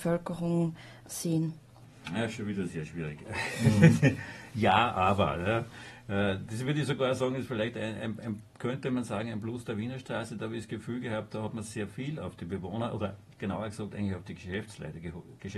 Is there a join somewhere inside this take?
no; 0 cuts

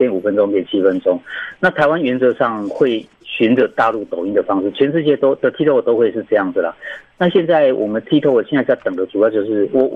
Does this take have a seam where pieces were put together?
yes; 1 cut; at 7.0 s

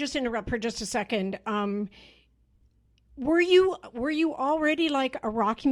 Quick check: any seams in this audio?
no; 0 cuts

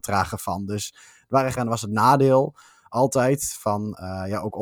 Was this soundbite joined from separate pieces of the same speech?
yes; 1 cut; at 1.6 s

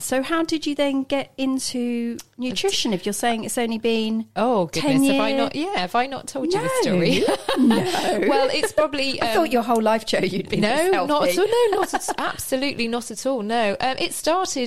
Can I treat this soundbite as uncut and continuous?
yes; 0 cuts

